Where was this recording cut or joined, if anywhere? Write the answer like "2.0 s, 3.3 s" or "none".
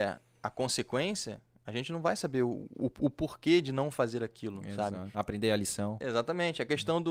5.1 s